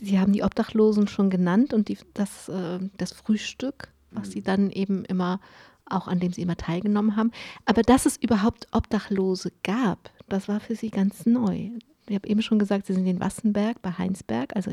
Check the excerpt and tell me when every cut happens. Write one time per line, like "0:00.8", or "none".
none